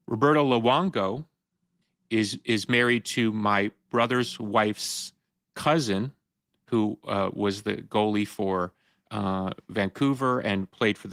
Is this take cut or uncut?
uncut